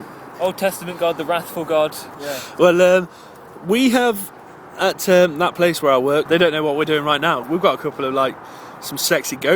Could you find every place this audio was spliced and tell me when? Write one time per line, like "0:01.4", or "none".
0:02.1
0:06.3
0:07.4

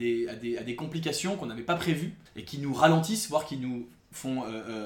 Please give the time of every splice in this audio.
0:02.3

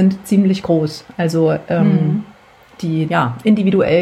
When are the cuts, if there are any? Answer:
0:03.1

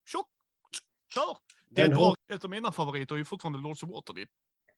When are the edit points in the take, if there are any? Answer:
0:02.1

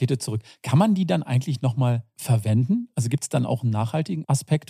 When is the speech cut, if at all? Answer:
none

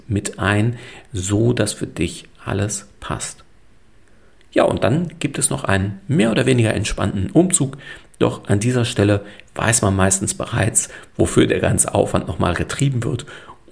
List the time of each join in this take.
none

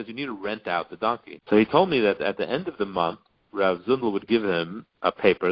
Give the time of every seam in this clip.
0:01.4

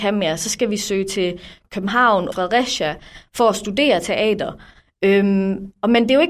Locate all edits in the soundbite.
0:02.3

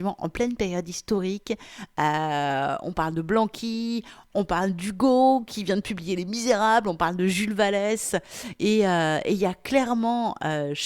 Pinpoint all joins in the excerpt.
none

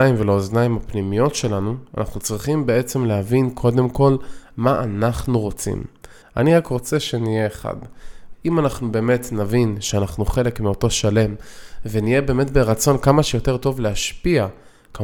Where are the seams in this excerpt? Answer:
0:06.2
0:08.3

